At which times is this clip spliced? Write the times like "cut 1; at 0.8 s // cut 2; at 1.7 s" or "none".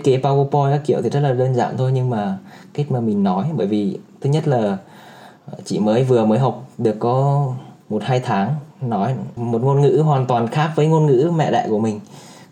cut 1; at 7.8 s // cut 2; at 9.4 s